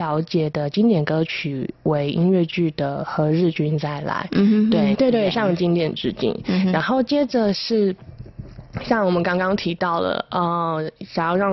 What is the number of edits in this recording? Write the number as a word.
one